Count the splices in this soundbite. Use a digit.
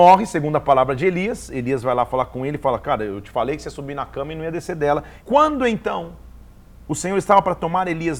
2